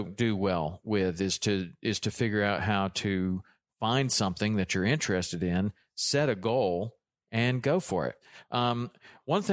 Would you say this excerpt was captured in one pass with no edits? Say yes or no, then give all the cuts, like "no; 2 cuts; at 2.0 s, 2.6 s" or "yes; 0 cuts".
yes; 0 cuts